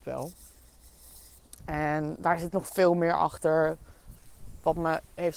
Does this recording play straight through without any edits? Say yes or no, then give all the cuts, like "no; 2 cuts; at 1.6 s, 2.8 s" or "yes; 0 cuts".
yes; 0 cuts